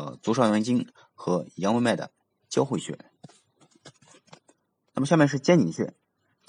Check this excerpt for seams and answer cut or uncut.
uncut